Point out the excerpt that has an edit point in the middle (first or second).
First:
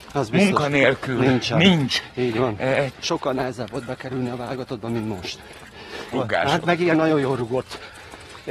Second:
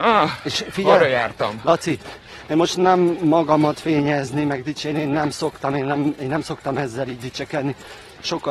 first